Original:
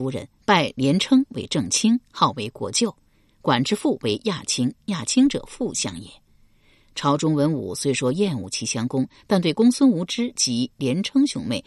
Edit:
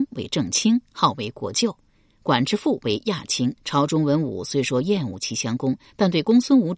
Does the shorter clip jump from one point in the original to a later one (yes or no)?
yes